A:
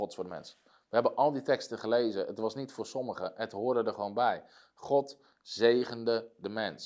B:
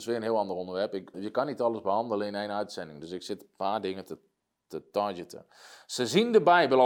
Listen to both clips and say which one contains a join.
B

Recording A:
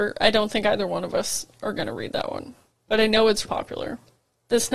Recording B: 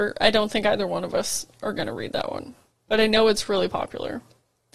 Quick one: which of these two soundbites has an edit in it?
A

